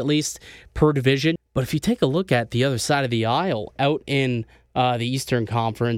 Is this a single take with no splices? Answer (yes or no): no